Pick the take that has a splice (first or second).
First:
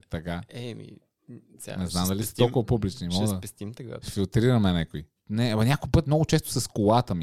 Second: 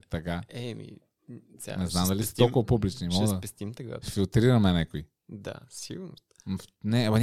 first